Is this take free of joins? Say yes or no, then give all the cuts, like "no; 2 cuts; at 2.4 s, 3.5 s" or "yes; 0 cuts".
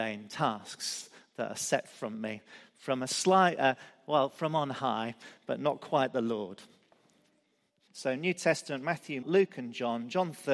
no; 2 cuts; at 7.9 s, 9.2 s